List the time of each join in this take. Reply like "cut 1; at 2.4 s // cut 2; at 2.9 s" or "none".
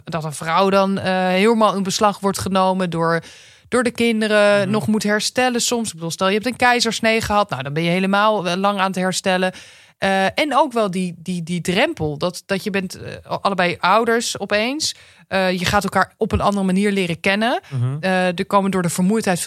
none